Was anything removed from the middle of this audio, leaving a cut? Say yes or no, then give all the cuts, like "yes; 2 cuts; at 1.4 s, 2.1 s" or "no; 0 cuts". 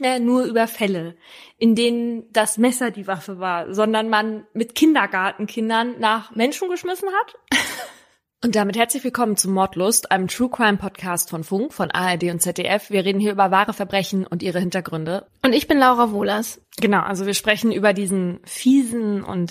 yes; 2 cuts; at 15.3 s, 16.6 s